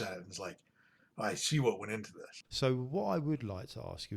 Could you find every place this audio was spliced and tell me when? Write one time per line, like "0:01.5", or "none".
0:02.4

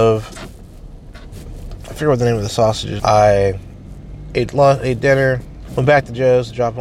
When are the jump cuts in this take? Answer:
0:01.8
0:03.0
0:05.7

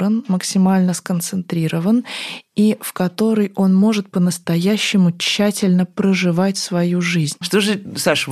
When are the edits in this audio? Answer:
0:07.4

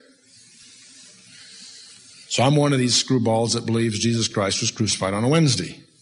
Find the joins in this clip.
0:02.1

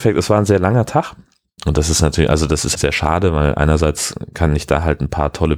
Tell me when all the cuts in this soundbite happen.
0:01.6
0:02.7

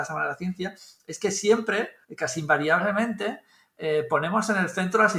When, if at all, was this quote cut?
0:02.0

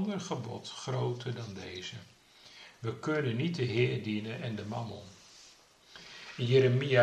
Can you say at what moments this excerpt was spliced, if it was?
0:02.7

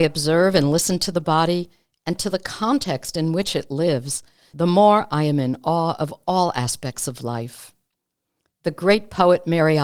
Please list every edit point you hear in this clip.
none

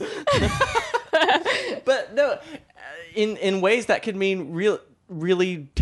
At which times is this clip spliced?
none

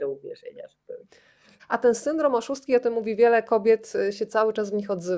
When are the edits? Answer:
0:01.6

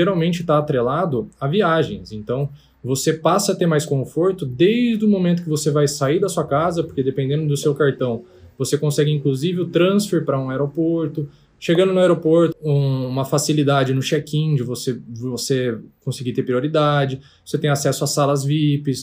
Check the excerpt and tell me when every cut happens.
0:12.5

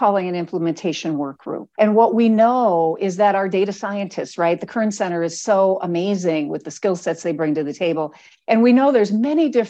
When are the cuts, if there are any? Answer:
0:01.7

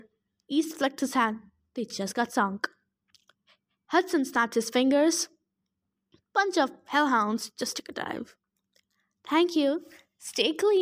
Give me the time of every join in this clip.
none

